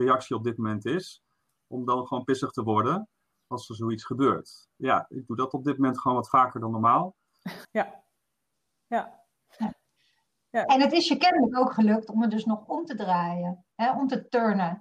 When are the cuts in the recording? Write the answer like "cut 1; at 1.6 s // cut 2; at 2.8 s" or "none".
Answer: cut 1; at 7.6 s